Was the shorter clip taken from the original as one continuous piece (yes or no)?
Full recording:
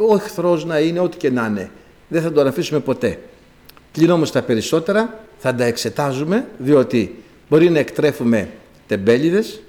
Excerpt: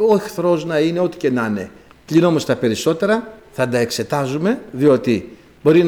no